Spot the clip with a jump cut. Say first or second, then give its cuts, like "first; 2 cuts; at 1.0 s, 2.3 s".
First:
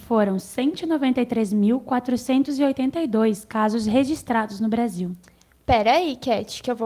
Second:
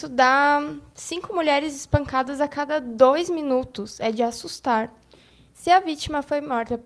second; 1 cut; at 5.5 s